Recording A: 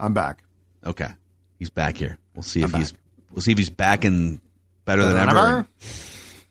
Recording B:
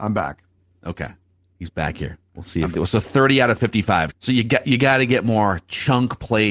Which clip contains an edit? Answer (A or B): B